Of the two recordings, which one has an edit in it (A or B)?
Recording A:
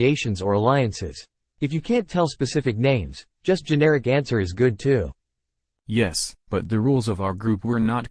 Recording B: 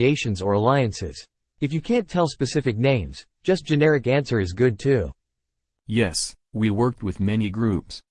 A